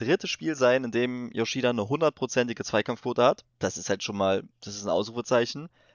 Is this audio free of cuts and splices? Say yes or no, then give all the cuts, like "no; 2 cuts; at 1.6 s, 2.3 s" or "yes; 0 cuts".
no; 1 cut; at 3.5 s